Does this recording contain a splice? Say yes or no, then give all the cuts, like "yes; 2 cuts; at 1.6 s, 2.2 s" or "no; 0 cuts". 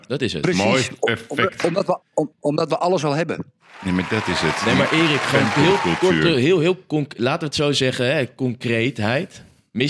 no; 0 cuts